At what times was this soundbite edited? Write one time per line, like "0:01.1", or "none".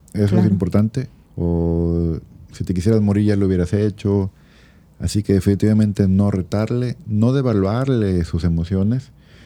0:01.2